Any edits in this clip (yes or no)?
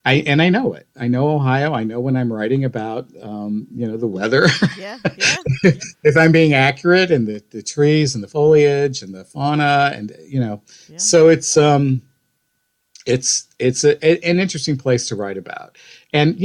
no